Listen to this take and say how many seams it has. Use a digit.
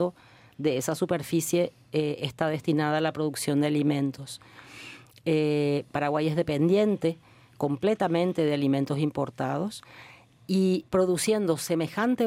1